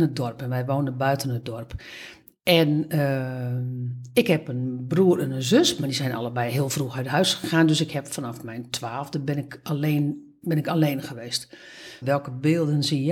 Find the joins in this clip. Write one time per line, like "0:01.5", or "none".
0:12.0